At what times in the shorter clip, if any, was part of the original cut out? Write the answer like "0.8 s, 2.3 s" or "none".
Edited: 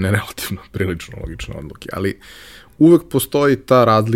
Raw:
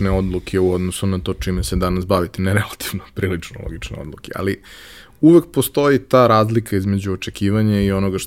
none